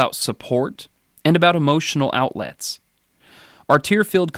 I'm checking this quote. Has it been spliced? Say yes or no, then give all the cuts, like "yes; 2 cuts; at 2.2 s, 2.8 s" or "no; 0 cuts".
no; 0 cuts